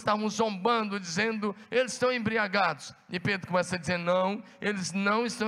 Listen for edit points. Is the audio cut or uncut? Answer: uncut